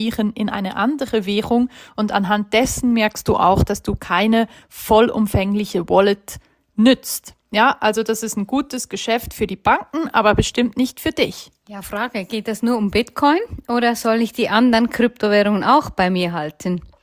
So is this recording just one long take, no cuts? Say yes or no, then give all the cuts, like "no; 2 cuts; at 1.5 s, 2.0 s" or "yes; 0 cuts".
yes; 0 cuts